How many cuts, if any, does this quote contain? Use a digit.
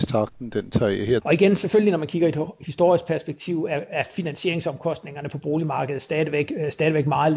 1